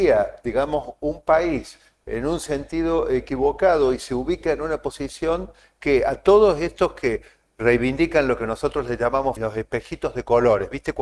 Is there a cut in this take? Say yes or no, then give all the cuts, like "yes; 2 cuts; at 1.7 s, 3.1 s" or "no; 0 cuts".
yes; 1 cut; at 9.4 s